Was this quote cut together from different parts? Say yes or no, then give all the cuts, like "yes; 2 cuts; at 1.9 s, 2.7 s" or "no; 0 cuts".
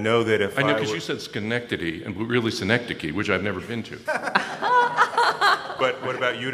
no; 0 cuts